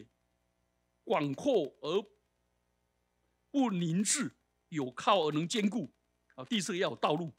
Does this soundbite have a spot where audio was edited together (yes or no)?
no